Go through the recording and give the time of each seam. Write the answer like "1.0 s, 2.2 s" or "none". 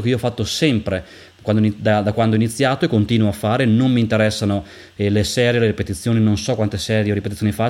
none